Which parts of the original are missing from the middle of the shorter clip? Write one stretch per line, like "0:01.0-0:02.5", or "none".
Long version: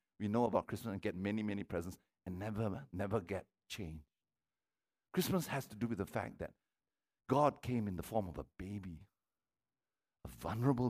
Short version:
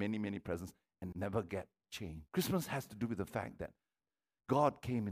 0:02.4-0:02.9
0:04.1-0:05.1